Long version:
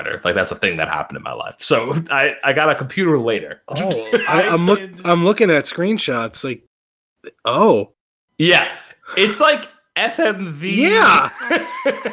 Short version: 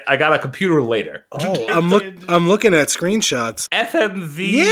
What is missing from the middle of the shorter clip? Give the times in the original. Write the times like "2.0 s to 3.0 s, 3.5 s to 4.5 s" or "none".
4.0 s to 4.4 s, 6.4 s to 9.9 s